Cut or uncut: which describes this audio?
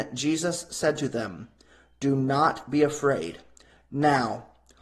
cut